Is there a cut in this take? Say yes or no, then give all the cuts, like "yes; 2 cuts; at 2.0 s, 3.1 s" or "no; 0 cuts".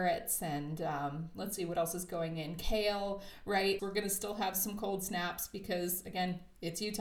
yes; 1 cut; at 3.8 s